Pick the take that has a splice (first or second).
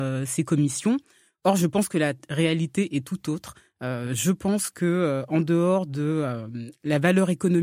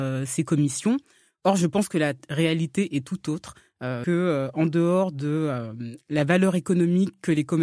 second